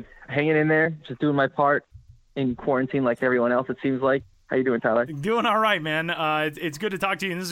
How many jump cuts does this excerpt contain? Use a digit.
0